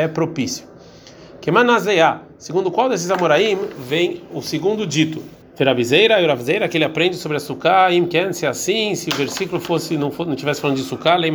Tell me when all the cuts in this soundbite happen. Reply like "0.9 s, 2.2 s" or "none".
5.4 s